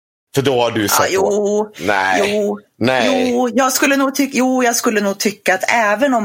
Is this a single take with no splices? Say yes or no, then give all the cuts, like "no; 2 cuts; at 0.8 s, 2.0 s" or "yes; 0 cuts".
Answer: yes; 0 cuts